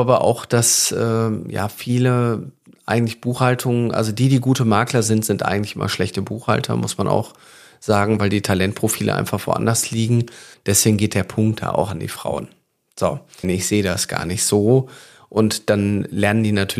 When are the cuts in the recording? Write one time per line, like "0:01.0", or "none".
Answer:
0:10.5
0:13.4